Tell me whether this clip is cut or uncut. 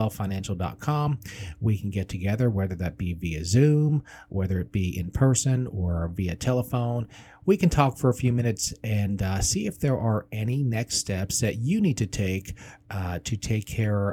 uncut